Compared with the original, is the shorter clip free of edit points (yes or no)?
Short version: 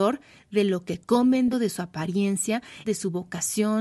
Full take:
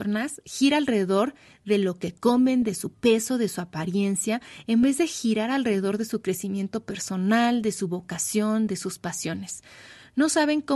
no